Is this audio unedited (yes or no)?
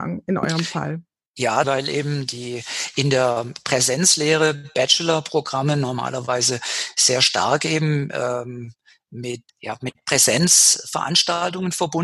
no